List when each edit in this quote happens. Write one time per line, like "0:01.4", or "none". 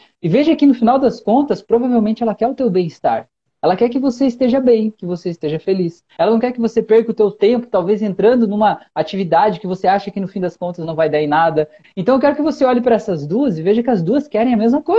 0:06.2
0:11.8